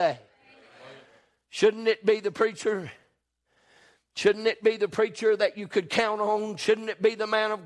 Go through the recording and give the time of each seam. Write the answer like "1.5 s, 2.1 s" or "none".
none